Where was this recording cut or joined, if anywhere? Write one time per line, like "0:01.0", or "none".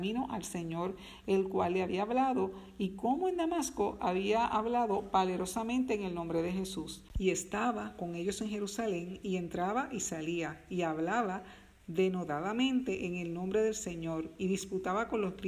none